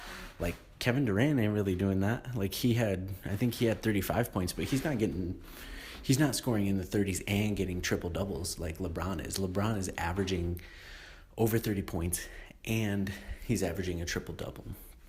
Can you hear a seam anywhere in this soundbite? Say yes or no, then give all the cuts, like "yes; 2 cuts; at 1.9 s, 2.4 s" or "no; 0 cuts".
no; 0 cuts